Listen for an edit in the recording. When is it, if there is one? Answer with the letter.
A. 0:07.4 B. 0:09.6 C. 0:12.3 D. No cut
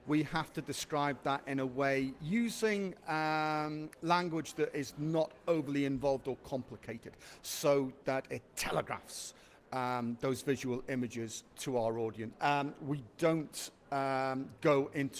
C